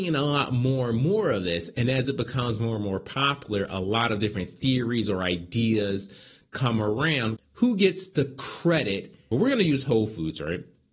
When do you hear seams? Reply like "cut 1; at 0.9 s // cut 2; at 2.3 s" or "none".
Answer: cut 1; at 7.4 s // cut 2; at 9.3 s